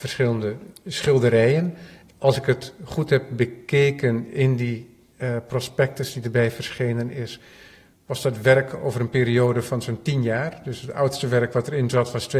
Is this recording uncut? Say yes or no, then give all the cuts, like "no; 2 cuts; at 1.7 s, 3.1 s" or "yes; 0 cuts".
yes; 0 cuts